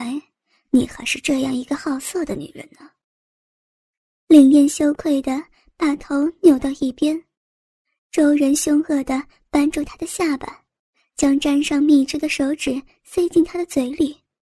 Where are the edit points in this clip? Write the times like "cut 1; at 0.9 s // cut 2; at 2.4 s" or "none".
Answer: none